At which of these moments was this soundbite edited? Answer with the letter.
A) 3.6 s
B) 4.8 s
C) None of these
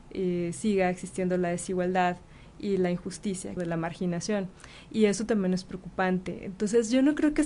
A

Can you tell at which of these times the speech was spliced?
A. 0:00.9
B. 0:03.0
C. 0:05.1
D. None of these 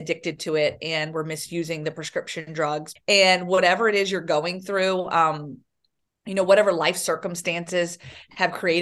B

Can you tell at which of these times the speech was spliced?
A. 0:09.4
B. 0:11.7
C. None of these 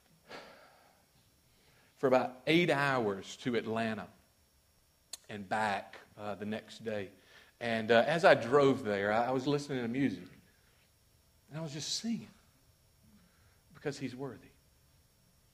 A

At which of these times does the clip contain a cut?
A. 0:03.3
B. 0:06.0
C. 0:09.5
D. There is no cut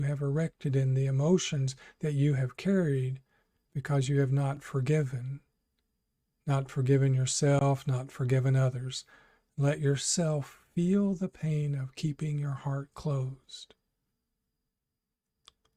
D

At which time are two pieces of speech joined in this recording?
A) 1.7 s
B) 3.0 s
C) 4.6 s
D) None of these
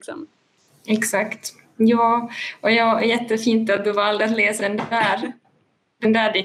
C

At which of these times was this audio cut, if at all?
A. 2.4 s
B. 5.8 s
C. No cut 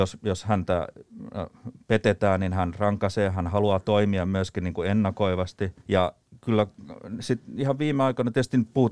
B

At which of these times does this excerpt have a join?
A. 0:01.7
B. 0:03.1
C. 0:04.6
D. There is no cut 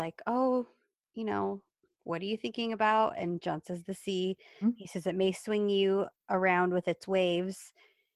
C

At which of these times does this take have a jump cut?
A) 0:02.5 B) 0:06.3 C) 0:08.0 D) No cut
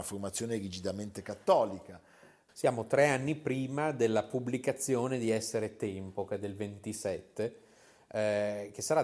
A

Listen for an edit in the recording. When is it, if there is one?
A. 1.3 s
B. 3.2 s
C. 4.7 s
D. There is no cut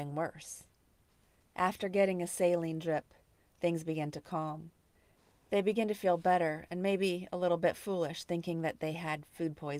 D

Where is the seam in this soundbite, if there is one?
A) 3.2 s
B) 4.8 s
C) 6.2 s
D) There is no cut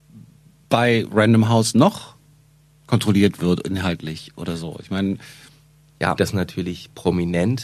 C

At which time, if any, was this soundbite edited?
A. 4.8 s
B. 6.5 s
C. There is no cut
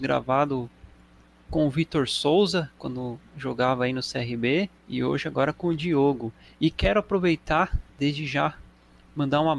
A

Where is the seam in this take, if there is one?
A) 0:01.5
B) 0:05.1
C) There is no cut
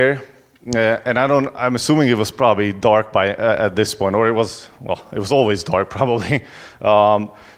C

